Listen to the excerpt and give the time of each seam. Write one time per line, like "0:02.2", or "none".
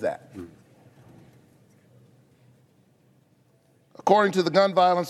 none